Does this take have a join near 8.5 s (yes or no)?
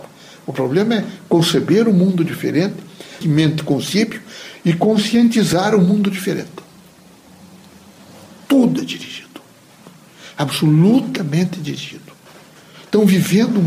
yes